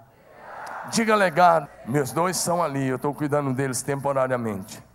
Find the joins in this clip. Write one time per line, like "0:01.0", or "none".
0:01.7